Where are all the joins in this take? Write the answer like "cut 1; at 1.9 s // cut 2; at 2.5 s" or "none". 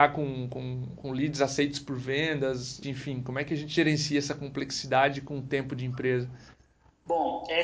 cut 1; at 2.8 s